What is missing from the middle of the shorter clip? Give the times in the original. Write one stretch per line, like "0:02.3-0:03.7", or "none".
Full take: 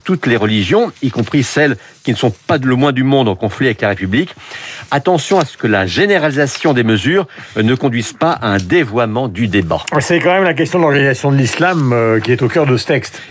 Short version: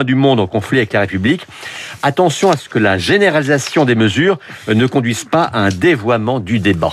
none